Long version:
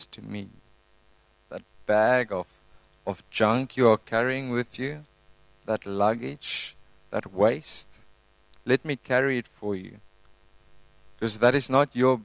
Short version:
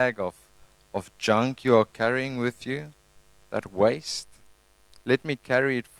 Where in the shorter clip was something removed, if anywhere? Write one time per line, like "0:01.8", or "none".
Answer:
0:03.4